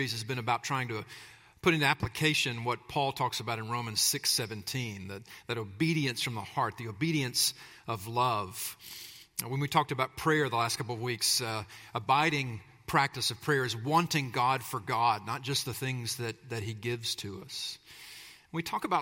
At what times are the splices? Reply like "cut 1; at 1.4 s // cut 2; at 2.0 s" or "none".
none